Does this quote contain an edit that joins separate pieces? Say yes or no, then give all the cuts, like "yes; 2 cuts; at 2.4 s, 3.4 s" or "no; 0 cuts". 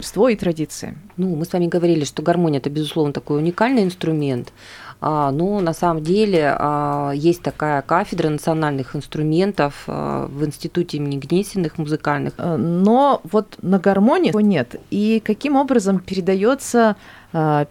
yes; 3 cuts; at 1.1 s, 12.4 s, 14.3 s